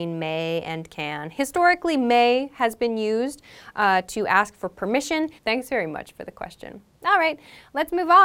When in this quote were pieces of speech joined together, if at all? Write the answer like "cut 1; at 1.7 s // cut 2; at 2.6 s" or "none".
cut 1; at 5.4 s